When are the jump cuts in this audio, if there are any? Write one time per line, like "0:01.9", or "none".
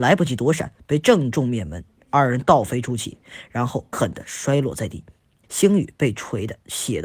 0:03.9
0:05.4